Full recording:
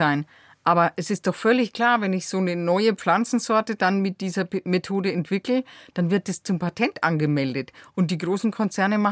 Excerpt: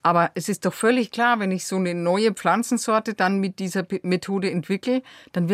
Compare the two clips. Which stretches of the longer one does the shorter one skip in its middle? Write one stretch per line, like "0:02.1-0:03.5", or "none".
none